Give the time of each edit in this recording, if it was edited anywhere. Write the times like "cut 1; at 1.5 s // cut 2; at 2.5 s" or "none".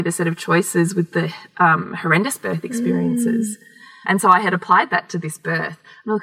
cut 1; at 4.0 s